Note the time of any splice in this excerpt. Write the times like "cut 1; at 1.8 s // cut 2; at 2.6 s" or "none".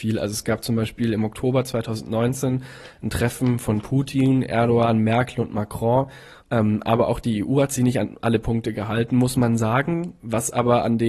cut 1; at 6.4 s